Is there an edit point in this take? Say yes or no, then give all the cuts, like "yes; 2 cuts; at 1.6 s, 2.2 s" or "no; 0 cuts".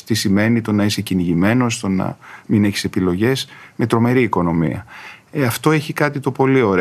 no; 0 cuts